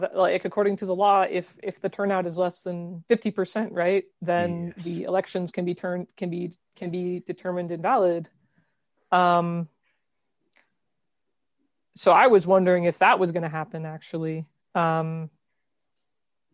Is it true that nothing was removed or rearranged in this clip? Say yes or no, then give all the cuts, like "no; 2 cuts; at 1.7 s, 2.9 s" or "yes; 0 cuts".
yes; 0 cuts